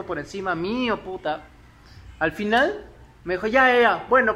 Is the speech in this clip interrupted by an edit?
no; 0 cuts

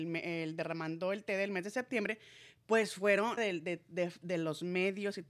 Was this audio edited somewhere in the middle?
yes; 1 cut; at 3.4 s

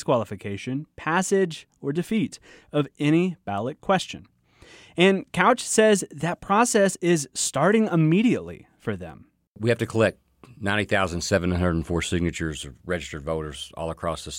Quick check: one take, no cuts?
yes; 0 cuts

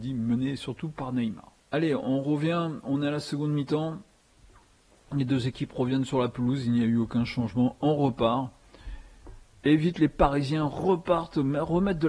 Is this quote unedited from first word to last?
no; 1 cut; at 1.6 s

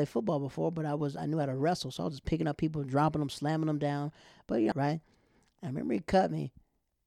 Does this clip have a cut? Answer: yes; 1 cut; at 4.7 s

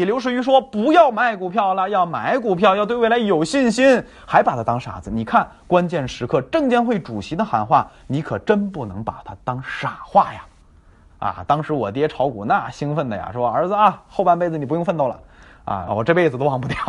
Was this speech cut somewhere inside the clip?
yes; 2 cuts; at 11.1 s, 15.9 s

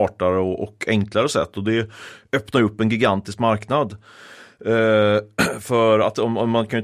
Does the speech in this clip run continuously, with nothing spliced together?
yes; 0 cuts

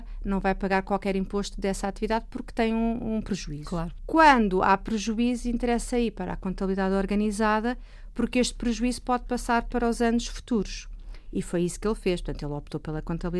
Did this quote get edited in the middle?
yes; 1 cut; at 4.0 s

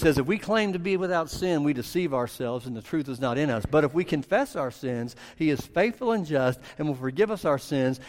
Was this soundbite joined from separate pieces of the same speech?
no; 0 cuts

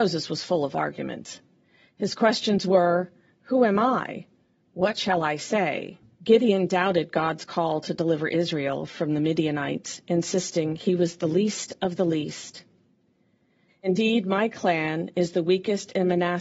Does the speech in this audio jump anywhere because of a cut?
yes; 2 cuts; at 6.2 s, 13.7 s

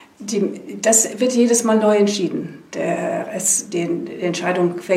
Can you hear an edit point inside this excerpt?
no; 0 cuts

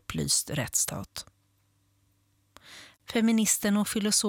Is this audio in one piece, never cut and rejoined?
no; 1 cut; at 2.9 s

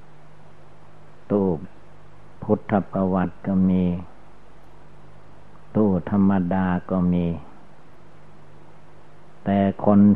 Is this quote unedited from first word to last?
no; 1 cut; at 1.6 s

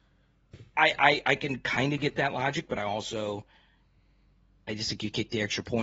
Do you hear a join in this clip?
no; 0 cuts

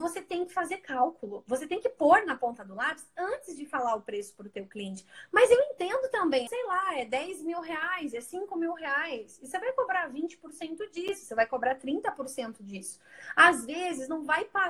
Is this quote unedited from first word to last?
no; 1 cut; at 6.5 s

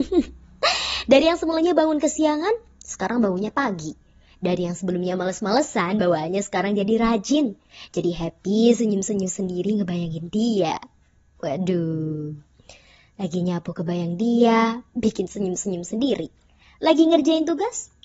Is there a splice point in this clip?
no; 0 cuts

